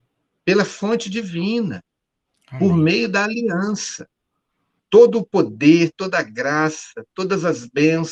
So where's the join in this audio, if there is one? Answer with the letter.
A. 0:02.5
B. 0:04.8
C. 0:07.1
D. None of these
B